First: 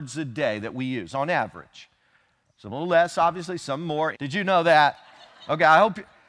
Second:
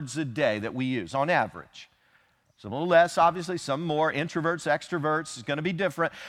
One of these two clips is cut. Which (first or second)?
first